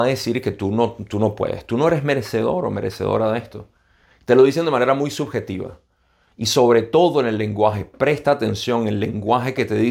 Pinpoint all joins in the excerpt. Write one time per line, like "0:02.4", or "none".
none